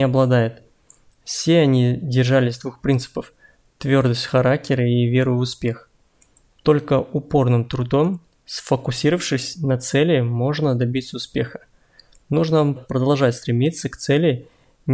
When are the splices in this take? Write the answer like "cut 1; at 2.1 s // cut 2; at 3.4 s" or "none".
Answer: cut 1; at 12.8 s